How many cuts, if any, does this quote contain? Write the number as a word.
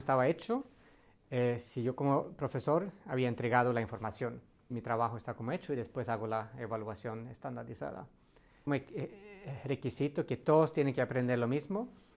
two